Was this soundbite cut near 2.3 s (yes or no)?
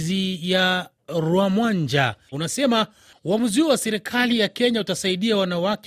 yes